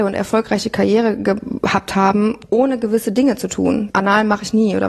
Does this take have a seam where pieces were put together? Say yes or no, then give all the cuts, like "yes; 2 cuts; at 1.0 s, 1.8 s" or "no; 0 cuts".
yes; 1 cut; at 3.9 s